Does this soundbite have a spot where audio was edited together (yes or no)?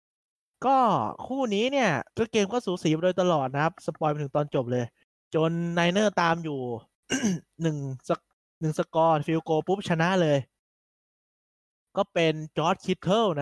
yes